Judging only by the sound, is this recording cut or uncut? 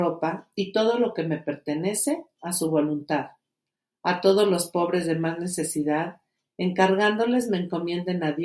uncut